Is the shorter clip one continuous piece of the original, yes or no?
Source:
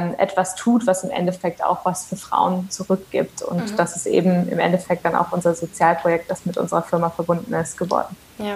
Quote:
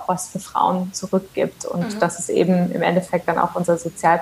yes